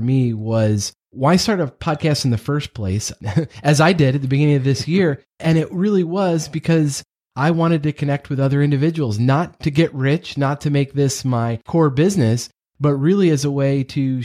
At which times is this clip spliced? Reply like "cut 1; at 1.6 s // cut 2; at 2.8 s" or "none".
none

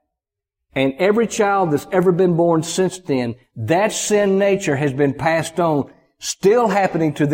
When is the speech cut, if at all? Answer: none

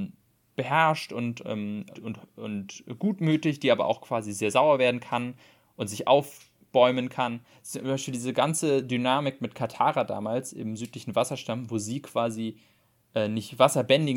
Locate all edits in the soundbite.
cut 1; at 1.9 s

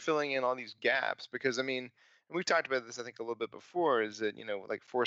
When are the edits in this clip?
none

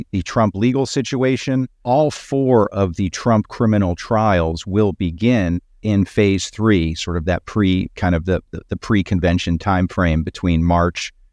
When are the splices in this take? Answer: cut 1; at 5.8 s // cut 2; at 7.9 s

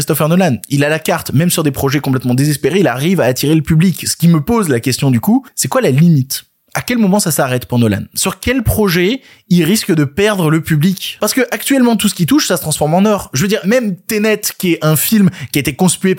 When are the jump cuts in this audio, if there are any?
cut 1; at 13.6 s

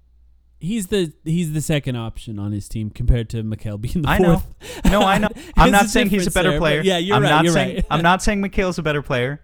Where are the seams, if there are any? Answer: cut 1; at 5.3 s

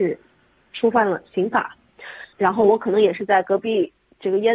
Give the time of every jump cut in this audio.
cut 1; at 2.3 s

